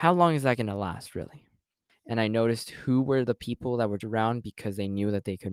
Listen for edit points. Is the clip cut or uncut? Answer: cut